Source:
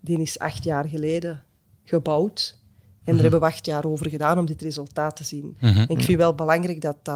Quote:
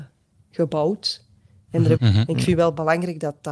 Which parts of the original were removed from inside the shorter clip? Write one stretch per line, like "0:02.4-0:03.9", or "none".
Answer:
0:03.3-0:05.6